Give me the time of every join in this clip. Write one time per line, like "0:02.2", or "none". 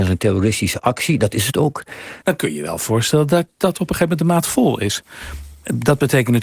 0:02.2

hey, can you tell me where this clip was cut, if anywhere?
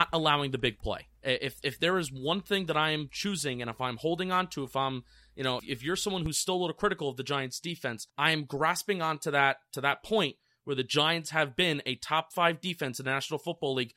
0:05.6
0:08.1

